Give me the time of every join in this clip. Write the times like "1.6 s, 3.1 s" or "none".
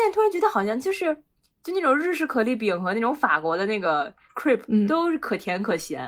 none